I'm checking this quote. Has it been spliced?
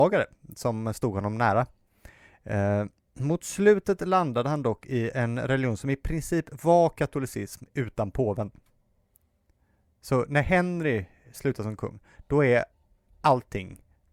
no; 0 cuts

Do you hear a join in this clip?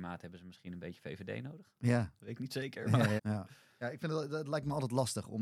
yes; 1 cut; at 3.2 s

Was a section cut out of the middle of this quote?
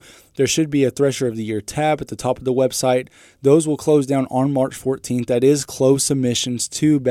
no; 0 cuts

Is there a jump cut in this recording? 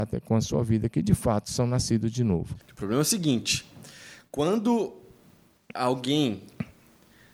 yes; 1 cut; at 2.6 s

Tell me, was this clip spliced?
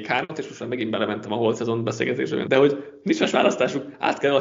yes; 1 cut; at 2.4 s

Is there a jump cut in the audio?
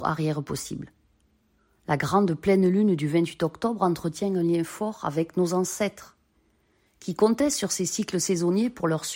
no; 0 cuts

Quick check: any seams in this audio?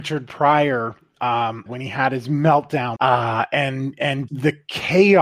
yes; 3 cuts; at 1.7 s, 3.0 s, 4.3 s

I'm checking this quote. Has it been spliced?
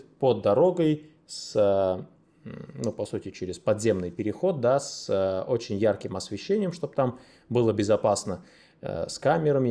no; 0 cuts

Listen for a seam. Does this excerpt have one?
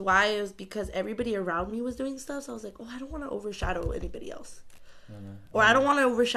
no; 0 cuts

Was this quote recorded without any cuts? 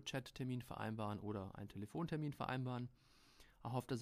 yes; 0 cuts

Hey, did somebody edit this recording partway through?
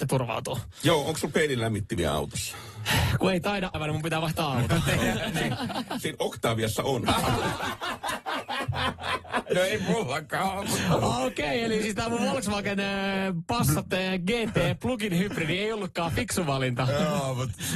yes; 1 cut; at 3.7 s

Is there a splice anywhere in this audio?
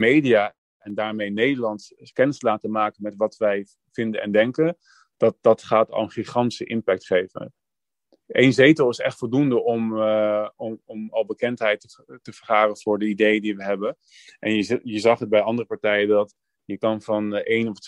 no; 0 cuts

